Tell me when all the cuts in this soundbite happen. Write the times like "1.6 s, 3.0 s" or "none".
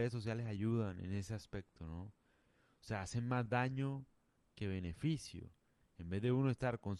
none